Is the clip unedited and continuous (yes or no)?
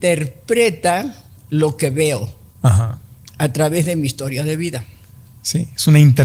yes